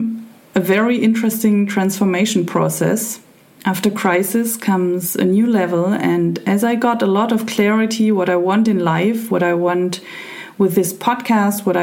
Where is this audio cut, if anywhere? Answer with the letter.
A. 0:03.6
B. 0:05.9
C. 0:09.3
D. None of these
A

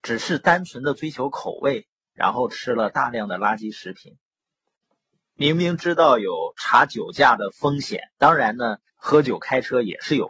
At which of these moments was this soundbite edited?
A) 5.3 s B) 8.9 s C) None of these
B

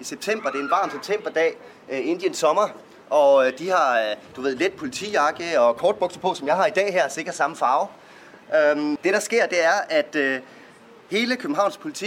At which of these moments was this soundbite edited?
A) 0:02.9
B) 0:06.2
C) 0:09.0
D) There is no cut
C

